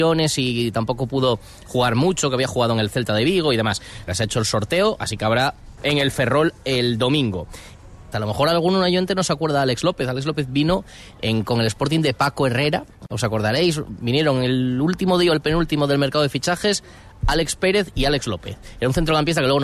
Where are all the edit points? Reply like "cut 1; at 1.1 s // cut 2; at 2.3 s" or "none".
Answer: cut 1; at 4.1 s // cut 2; at 5.8 s // cut 3; at 8.1 s